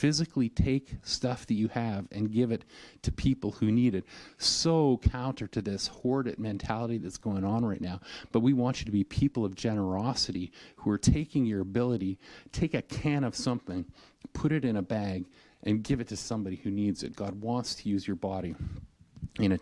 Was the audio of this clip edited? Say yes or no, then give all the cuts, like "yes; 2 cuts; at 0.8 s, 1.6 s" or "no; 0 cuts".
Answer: no; 0 cuts